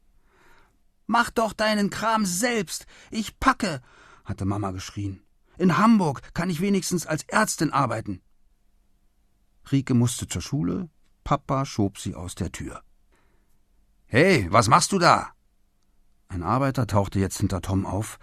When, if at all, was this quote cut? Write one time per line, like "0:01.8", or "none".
none